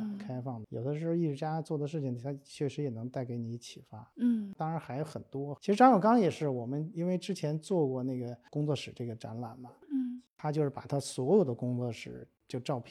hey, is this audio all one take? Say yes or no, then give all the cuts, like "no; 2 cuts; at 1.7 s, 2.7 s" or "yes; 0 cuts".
yes; 0 cuts